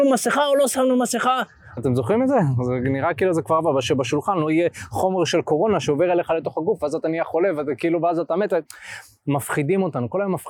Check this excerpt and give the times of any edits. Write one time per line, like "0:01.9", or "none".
0:01.8